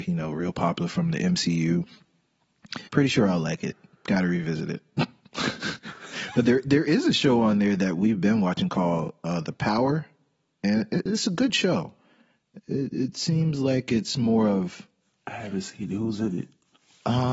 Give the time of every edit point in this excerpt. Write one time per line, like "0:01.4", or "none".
0:02.9
0:11.1